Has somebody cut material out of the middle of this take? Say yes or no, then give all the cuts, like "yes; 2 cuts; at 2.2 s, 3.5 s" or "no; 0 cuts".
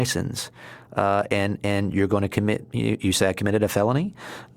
no; 0 cuts